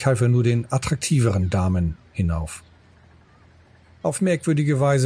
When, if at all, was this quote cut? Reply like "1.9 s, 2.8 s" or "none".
none